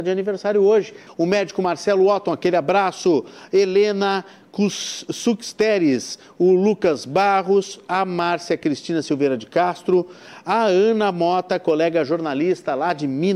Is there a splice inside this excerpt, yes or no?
yes